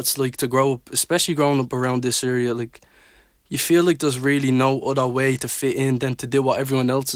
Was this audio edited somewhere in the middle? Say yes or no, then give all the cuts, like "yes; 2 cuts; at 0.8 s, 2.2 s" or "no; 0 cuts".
no; 0 cuts